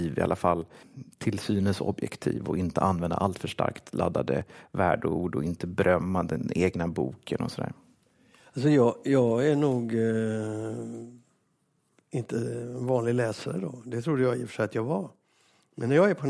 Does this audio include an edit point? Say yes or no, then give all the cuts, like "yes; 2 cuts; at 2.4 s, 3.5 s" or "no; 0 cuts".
no; 0 cuts